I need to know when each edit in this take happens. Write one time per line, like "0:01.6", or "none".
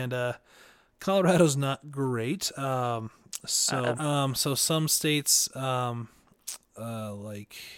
0:03.9